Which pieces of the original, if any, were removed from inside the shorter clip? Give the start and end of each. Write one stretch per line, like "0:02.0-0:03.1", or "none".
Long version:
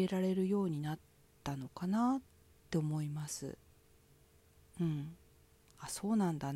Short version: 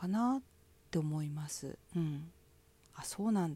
0:03.6-0:04.7